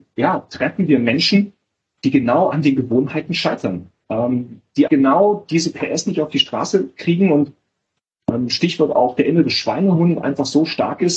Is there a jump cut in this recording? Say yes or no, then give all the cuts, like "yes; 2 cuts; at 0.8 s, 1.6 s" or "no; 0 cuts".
yes; 1 cut; at 4.9 s